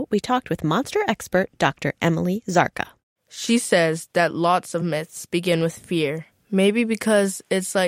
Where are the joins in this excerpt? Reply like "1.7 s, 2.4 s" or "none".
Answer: 6.3 s